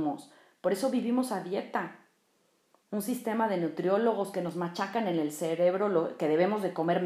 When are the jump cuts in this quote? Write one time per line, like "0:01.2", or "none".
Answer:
0:02.8